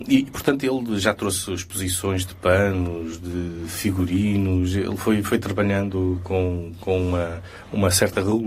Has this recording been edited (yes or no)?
no